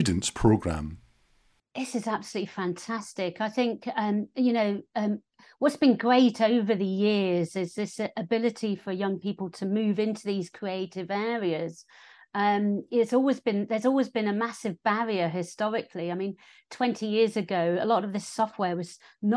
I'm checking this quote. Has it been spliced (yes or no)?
no